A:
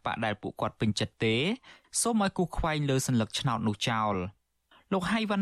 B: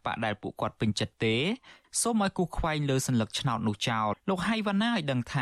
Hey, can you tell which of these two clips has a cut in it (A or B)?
B